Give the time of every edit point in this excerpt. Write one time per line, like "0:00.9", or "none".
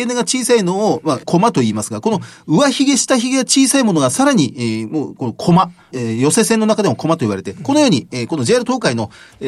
none